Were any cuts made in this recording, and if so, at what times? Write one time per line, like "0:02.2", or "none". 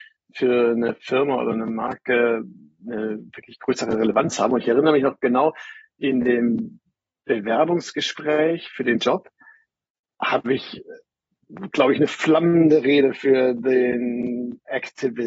none